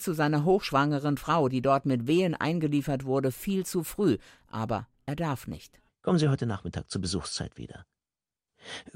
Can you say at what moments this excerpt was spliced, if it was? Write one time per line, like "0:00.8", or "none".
none